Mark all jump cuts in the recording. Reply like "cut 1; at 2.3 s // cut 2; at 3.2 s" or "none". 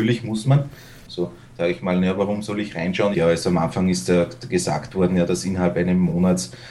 cut 1; at 1.1 s // cut 2; at 3.1 s

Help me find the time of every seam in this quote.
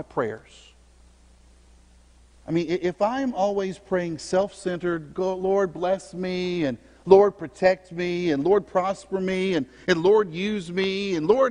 none

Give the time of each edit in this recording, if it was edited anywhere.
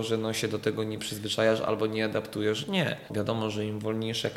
cut 1; at 3.1 s

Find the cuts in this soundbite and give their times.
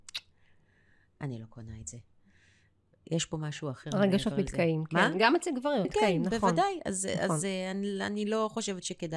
cut 1; at 5.8 s

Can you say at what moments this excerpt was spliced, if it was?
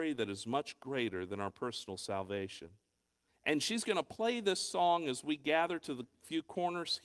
cut 1; at 3.3 s

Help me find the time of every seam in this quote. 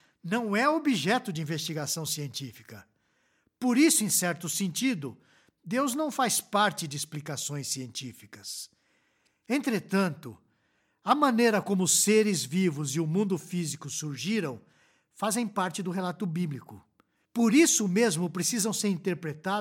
none

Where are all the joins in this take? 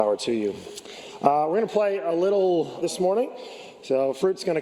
cut 1; at 2.8 s

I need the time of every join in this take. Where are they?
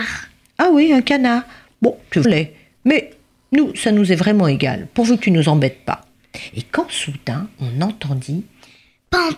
cut 1; at 2.2 s

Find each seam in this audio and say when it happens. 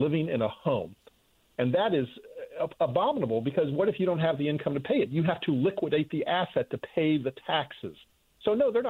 none

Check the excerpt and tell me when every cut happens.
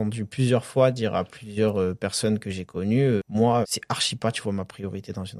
cut 1; at 3.6 s

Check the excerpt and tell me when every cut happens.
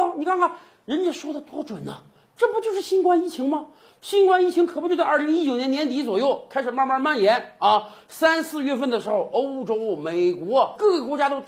none

